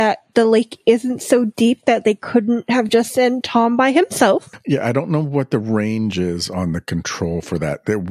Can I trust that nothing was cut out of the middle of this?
yes; 0 cuts

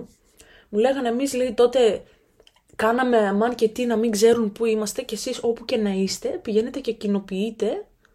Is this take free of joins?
yes; 0 cuts

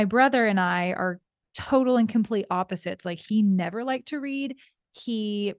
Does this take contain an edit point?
no; 0 cuts

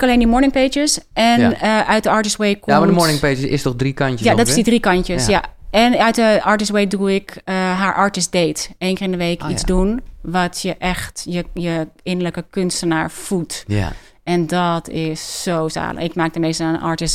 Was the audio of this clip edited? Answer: no; 0 cuts

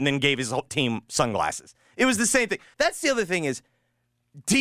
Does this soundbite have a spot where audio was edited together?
yes; 1 cut; at 2.7 s

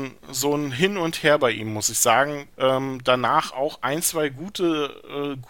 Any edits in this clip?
yes; 1 cut; at 2.5 s

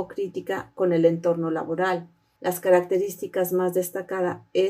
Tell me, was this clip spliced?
yes; 1 cut; at 2.4 s

